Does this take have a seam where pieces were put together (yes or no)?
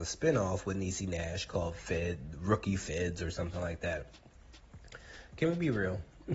no